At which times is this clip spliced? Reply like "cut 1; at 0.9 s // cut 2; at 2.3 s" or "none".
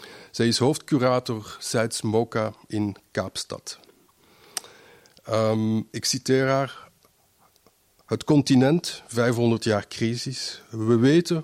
none